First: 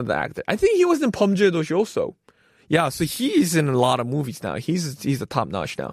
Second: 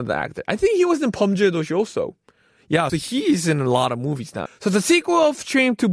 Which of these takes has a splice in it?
second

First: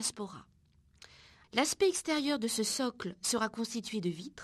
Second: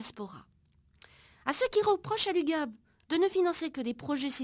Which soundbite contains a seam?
first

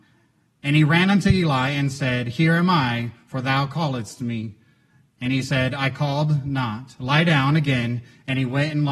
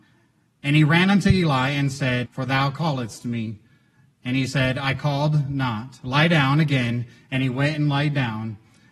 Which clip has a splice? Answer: second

